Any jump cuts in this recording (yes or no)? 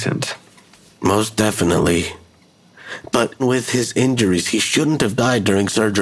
yes